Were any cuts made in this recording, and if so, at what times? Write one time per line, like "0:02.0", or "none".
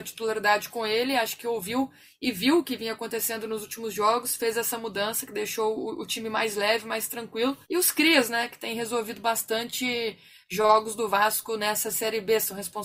0:07.6